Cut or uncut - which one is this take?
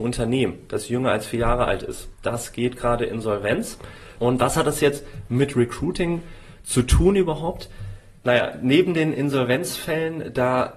cut